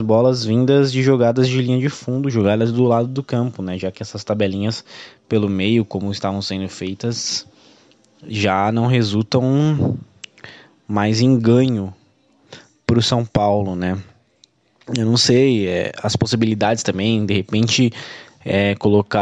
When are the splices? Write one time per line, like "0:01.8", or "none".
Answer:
none